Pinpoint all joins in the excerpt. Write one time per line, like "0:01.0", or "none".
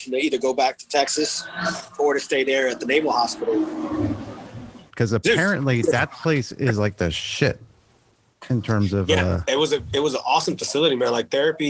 0:04.9